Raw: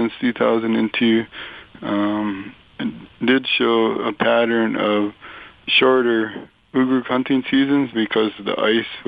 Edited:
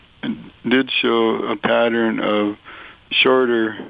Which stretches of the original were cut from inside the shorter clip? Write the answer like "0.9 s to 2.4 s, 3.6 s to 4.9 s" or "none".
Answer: none